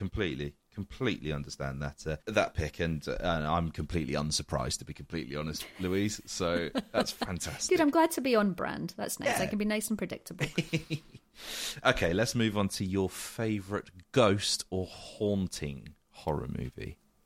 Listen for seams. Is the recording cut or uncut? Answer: uncut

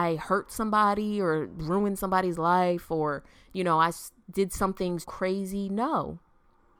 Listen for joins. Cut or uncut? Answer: cut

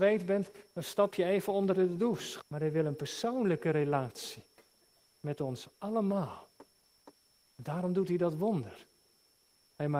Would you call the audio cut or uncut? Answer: cut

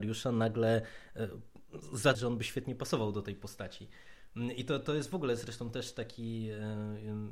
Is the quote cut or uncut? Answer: cut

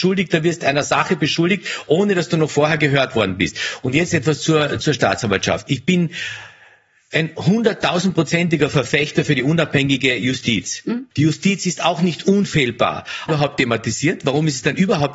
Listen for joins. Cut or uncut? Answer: cut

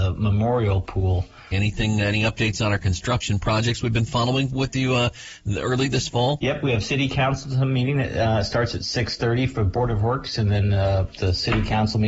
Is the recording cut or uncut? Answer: cut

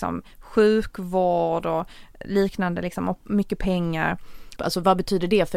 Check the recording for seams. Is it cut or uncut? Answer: cut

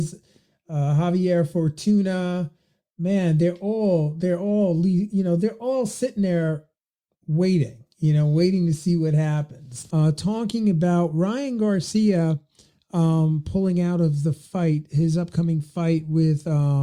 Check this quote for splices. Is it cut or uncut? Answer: cut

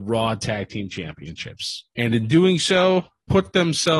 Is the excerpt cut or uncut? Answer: uncut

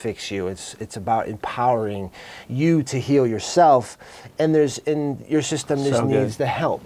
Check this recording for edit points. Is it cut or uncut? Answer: uncut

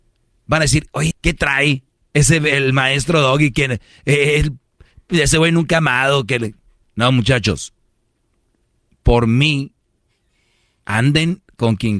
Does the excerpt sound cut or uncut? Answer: cut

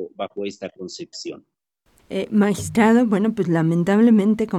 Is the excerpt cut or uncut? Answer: cut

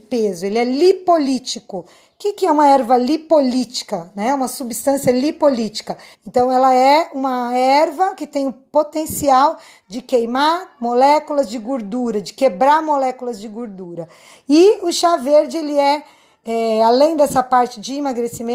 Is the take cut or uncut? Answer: cut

